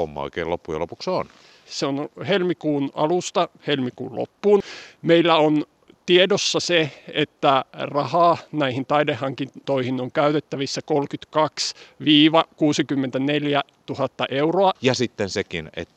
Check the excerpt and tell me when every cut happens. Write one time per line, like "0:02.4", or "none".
0:01.7
0:14.8